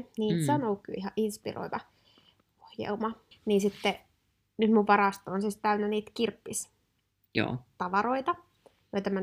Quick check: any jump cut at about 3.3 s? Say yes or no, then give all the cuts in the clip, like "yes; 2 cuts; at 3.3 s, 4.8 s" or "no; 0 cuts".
yes; 1 cut; at 3.3 s